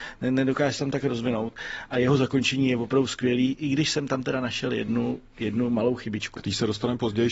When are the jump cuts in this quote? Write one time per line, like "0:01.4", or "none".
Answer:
none